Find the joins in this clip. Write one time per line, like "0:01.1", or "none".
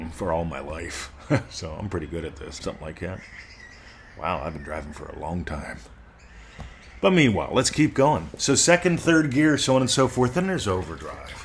0:02.6